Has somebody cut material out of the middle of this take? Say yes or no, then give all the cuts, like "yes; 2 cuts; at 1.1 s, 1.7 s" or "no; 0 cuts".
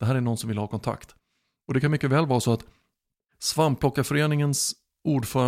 no; 0 cuts